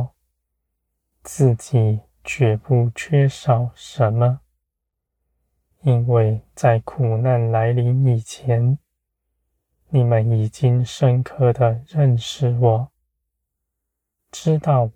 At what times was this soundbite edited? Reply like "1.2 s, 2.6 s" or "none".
5.7 s